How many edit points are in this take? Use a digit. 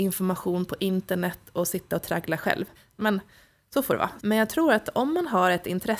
2